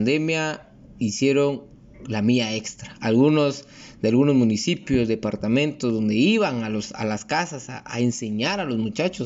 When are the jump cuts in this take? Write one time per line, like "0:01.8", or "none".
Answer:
none